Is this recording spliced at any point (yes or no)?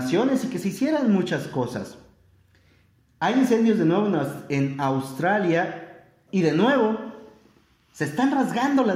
yes